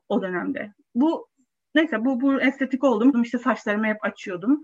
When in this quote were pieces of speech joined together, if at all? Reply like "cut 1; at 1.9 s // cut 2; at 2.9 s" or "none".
cut 1; at 3.1 s